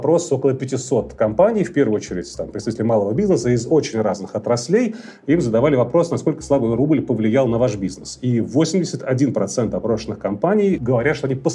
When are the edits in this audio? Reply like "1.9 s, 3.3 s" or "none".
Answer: none